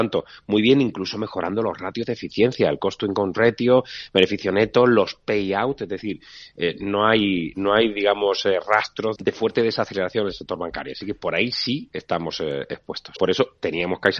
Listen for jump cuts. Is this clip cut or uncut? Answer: cut